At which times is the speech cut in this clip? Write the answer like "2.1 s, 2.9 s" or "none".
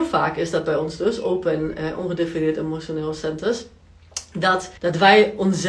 4.8 s